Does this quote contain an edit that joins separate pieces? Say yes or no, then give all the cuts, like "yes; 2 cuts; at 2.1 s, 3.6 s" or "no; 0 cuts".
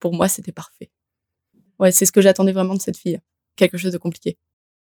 no; 0 cuts